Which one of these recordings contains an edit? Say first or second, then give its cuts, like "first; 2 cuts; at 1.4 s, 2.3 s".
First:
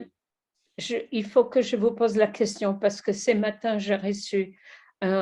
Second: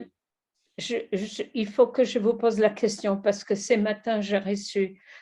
first; 1 cut; at 1.1 s